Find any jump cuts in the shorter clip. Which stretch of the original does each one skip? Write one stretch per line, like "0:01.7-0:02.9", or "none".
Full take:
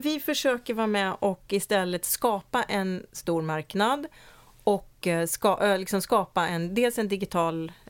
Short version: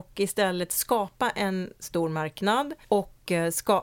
0:04.2-0:04.6